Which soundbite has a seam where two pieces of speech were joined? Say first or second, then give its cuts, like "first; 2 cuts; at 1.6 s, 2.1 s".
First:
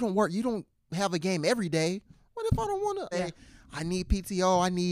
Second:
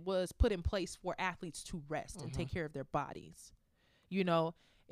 first; 1 cut; at 3.1 s